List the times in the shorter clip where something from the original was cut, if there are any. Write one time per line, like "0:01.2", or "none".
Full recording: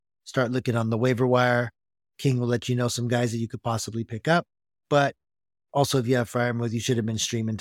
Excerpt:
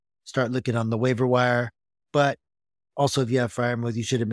0:02.0